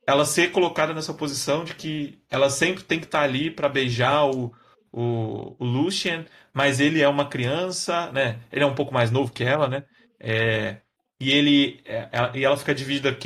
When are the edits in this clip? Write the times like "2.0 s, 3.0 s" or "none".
none